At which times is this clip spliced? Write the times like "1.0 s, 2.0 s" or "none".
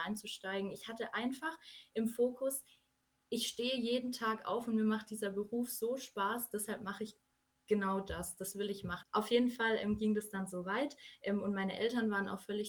9.0 s